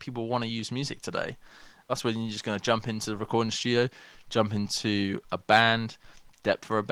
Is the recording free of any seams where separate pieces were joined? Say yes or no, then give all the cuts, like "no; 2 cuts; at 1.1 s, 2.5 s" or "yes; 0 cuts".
no; 1 cut; at 1.9 s